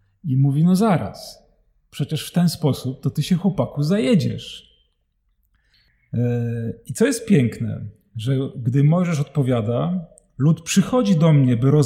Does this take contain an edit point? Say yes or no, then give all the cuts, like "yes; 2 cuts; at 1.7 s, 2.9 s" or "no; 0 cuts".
no; 0 cuts